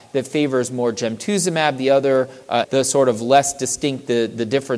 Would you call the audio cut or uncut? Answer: cut